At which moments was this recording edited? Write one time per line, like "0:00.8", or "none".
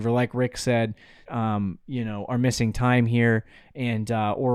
0:01.3